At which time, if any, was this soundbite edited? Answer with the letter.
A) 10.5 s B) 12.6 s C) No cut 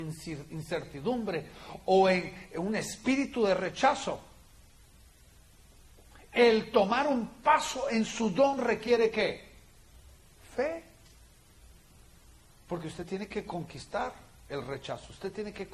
C